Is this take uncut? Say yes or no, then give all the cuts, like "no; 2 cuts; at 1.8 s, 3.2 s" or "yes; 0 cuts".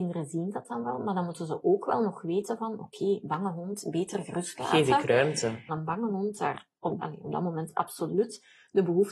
no; 2 cuts; at 5.7 s, 7.0 s